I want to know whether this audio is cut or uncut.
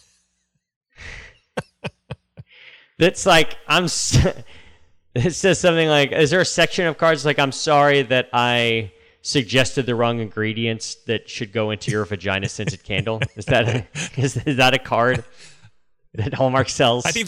uncut